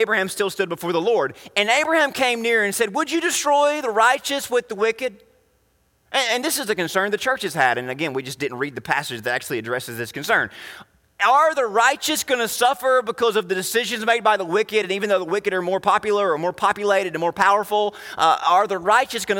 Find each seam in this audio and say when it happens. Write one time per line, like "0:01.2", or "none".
none